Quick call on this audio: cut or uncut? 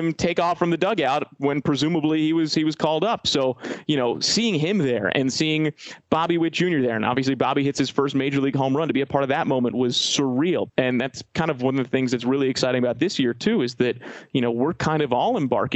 cut